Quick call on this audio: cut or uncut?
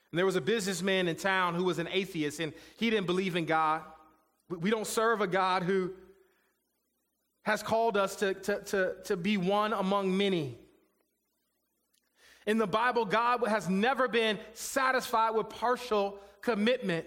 cut